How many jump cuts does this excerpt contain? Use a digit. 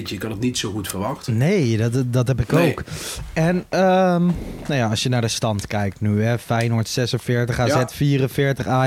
0